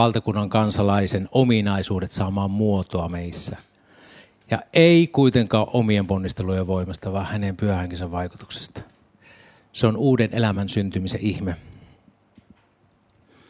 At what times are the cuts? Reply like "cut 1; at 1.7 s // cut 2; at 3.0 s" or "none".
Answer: cut 1; at 9.6 s